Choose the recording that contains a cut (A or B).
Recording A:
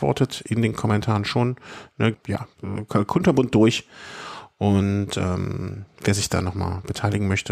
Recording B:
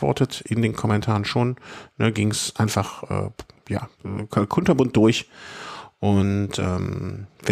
A